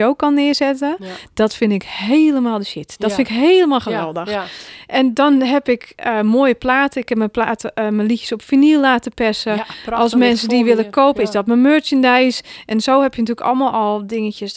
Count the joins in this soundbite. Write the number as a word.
zero